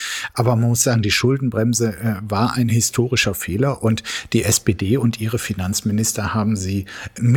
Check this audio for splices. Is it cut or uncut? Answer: uncut